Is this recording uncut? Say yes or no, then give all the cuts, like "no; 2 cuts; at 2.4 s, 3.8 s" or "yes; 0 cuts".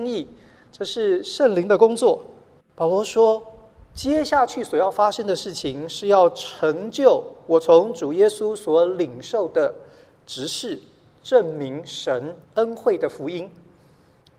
no; 2 cuts; at 2.6 s, 12.4 s